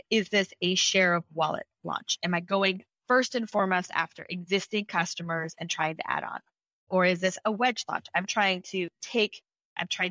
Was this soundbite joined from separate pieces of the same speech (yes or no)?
no